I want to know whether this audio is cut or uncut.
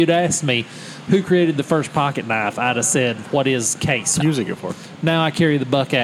cut